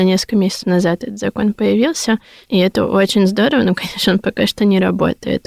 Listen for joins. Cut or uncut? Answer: uncut